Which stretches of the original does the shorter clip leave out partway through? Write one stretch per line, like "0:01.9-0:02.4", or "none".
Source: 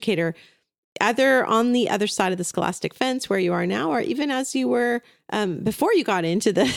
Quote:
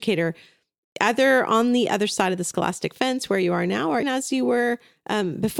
0:04.0-0:04.3